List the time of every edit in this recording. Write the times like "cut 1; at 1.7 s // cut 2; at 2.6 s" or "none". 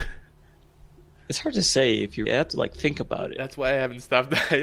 cut 1; at 2.2 s

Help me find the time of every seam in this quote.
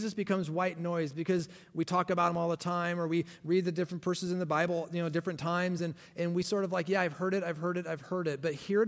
none

